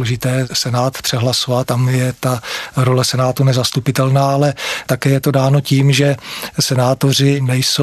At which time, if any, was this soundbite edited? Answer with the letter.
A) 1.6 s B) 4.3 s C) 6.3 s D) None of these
A